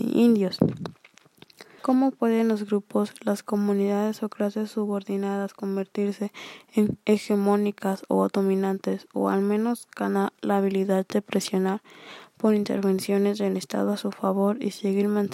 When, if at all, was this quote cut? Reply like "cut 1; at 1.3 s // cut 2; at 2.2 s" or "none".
cut 1; at 1.8 s